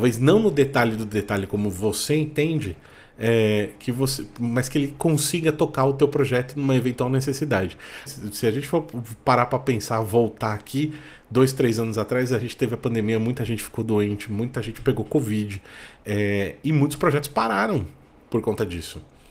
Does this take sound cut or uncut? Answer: cut